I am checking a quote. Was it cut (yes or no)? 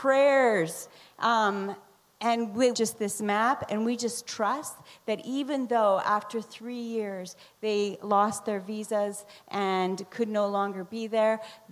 yes